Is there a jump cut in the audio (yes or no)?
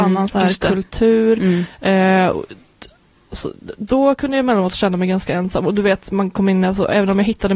no